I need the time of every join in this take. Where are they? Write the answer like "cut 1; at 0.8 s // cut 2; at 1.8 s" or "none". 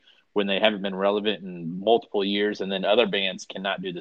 none